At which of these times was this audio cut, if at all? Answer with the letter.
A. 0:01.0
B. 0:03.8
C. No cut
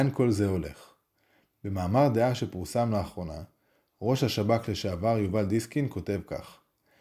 C